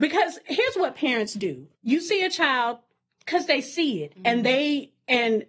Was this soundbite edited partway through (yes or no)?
yes